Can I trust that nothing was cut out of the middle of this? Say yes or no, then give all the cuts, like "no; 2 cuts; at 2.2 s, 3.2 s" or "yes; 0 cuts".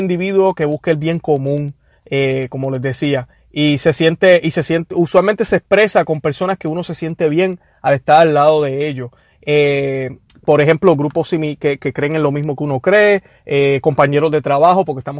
yes; 0 cuts